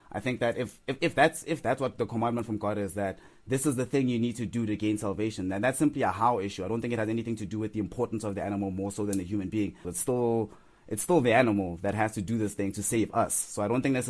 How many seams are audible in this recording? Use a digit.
1